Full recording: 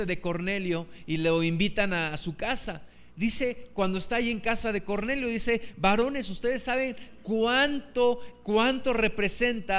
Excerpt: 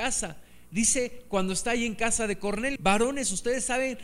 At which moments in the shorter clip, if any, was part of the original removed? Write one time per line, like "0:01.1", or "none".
0:02.8